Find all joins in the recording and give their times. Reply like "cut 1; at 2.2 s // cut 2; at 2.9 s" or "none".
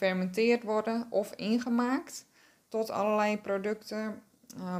none